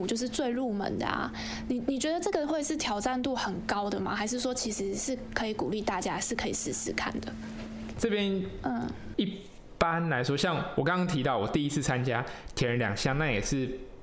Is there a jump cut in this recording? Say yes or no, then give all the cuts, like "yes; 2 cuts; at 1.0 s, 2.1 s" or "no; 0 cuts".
yes; 2 cuts; at 7.9 s, 9.1 s